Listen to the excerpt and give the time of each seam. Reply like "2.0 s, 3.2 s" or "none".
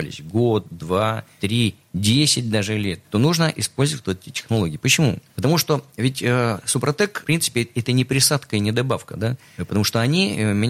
none